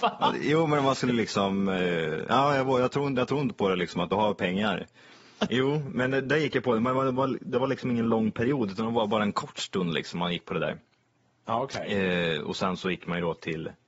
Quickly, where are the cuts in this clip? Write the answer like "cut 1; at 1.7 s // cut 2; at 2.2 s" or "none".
cut 1; at 5.5 s